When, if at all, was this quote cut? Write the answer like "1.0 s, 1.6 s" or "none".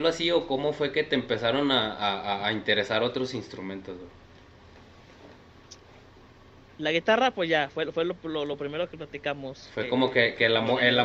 none